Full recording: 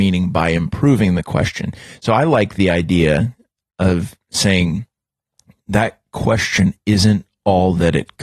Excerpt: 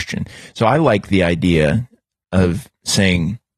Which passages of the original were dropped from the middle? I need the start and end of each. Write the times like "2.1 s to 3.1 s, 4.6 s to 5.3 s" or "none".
none